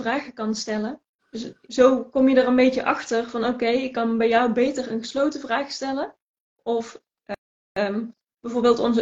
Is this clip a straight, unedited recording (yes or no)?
no